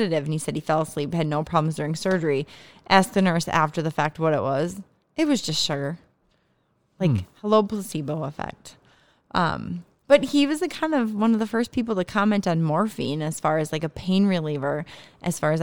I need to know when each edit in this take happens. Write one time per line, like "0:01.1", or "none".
none